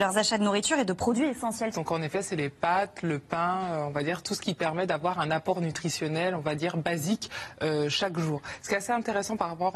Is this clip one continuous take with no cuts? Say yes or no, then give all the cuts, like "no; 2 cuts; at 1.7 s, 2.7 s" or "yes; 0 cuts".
no; 1 cut; at 1.7 s